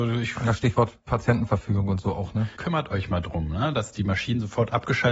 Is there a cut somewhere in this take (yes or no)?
yes